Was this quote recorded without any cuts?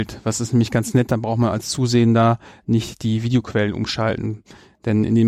yes; 0 cuts

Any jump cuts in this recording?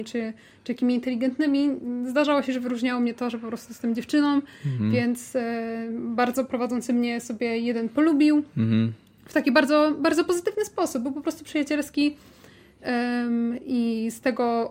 no; 0 cuts

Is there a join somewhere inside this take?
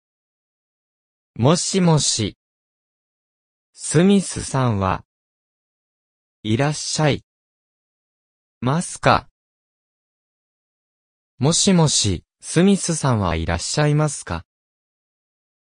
no; 0 cuts

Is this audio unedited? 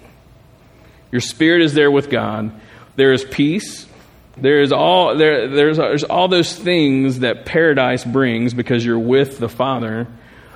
no; 1 cut; at 4.4 s

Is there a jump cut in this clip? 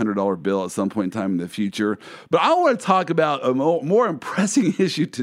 no; 0 cuts

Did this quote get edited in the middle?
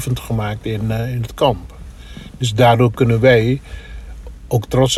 no; 0 cuts

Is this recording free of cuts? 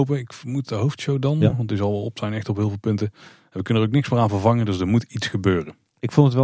yes; 0 cuts

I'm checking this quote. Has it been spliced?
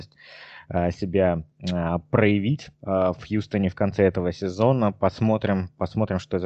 yes; 1 cut; at 2.7 s

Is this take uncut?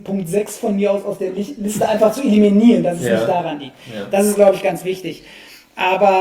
yes; 0 cuts

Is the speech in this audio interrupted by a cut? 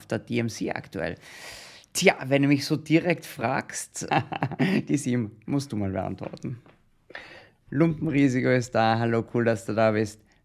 yes; 2 cuts; at 4.1 s, 7.7 s

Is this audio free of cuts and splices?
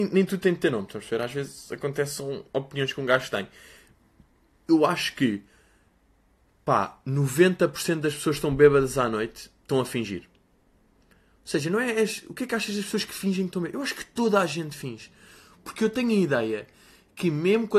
yes; 0 cuts

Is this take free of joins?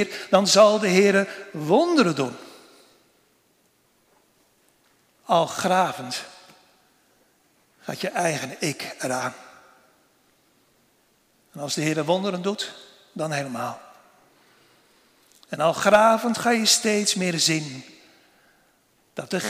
yes; 0 cuts

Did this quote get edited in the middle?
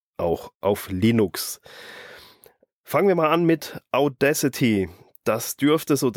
yes; 1 cut; at 2.7 s

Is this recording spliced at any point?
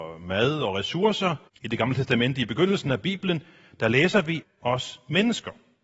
yes; 2 cuts; at 1.5 s, 4.4 s

